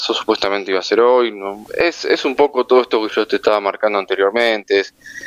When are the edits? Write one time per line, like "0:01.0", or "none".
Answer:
0:01.7
0:03.1